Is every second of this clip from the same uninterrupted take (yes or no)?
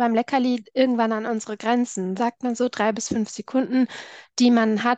no